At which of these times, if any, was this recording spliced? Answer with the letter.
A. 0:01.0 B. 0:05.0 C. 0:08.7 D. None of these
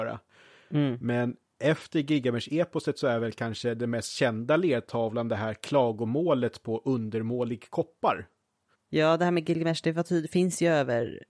C